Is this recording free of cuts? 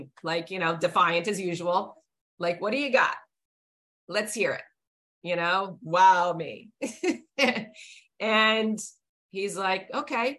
yes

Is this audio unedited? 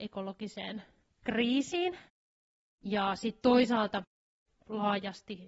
yes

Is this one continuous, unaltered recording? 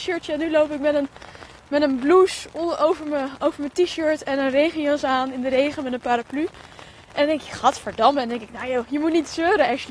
yes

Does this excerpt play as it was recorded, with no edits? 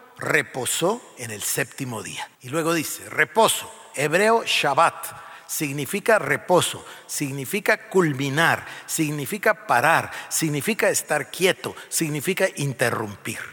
no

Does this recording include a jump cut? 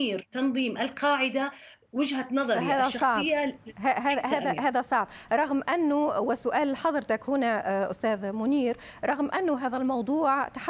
no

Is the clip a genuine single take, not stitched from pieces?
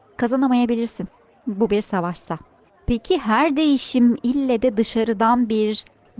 no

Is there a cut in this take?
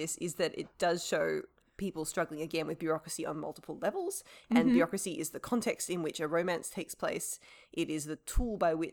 no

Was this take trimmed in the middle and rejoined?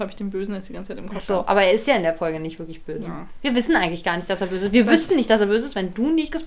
no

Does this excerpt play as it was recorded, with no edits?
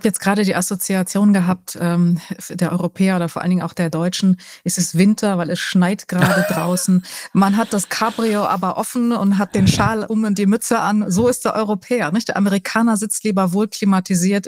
yes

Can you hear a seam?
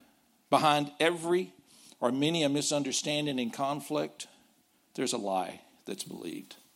no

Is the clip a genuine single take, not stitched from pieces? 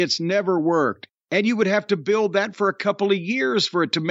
no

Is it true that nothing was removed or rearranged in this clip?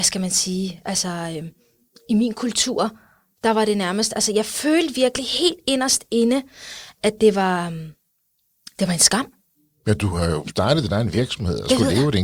yes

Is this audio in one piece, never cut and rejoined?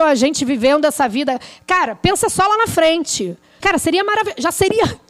no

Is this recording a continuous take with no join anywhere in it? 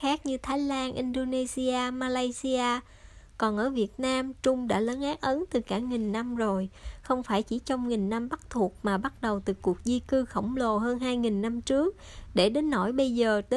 yes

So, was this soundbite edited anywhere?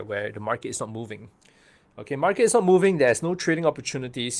no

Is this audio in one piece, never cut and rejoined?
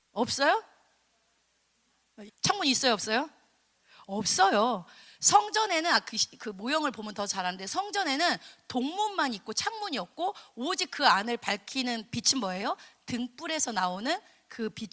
no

